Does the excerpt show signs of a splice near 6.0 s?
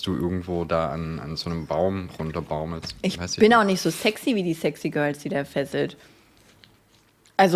no; 0 cuts

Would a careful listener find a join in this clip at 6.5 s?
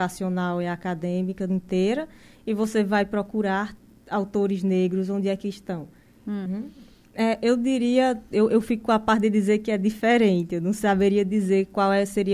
yes; 1 cut; at 6.5 s

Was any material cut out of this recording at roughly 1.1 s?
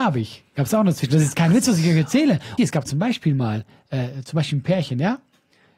no; 1 cut; at 2.6 s

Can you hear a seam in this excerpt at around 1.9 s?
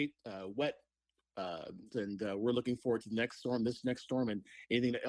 yes; 1 cut; at 1.9 s

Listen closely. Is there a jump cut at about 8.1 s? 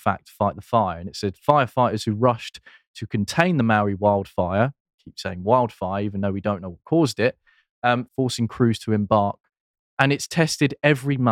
yes; 2 cuts; at 8.1 s, 9.8 s

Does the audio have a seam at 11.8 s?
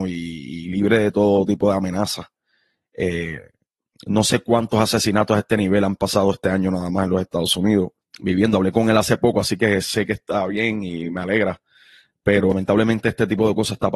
no; 1 cut; at 8.0 s

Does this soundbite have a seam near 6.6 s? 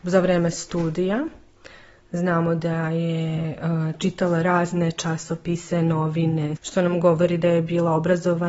yes; 1 cut; at 6.6 s

